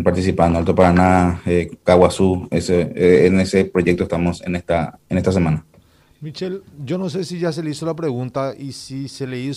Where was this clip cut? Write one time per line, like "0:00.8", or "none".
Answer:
none